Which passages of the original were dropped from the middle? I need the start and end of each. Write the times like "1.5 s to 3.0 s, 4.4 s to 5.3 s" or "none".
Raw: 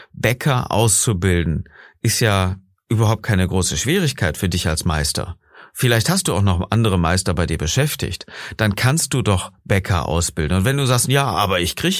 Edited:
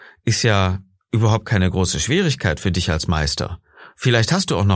none